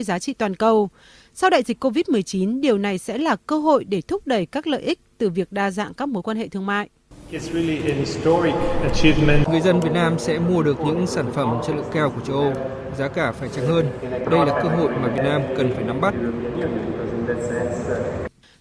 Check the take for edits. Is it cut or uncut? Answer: cut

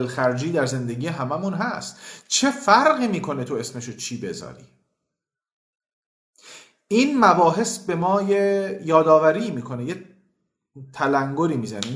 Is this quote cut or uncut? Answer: uncut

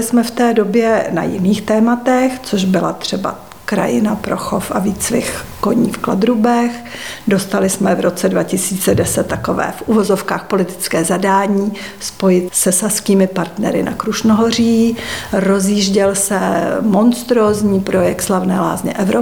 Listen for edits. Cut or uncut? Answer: cut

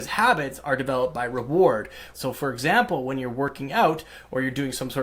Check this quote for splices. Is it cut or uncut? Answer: cut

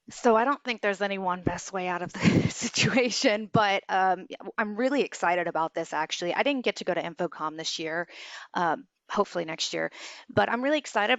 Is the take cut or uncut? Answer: uncut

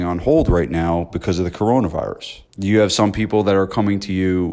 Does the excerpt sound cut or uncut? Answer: cut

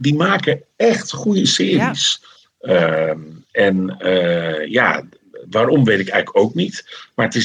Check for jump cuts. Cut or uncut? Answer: cut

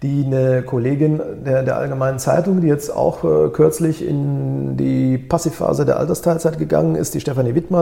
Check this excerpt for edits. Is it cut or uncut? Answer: uncut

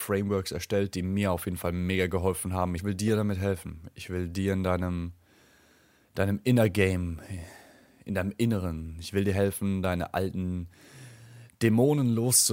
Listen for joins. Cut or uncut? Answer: cut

